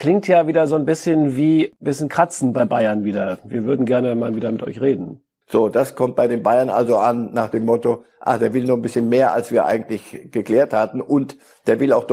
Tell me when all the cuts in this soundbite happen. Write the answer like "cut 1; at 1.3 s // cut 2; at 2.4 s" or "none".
cut 1; at 5.4 s